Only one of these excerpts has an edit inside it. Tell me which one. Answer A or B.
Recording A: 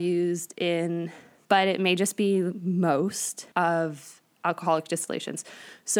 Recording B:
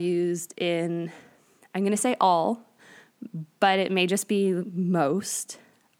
A